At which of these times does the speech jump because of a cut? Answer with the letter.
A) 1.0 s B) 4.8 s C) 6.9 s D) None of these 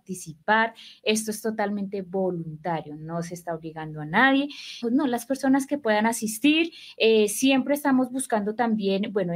B